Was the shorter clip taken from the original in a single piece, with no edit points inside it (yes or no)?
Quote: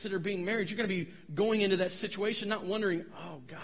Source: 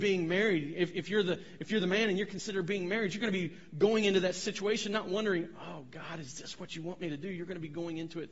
yes